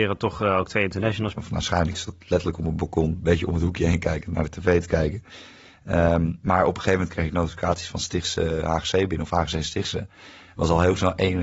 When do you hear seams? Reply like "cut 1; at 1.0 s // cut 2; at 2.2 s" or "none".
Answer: cut 1; at 1.4 s